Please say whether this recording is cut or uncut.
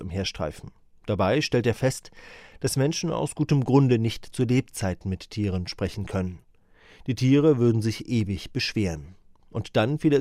uncut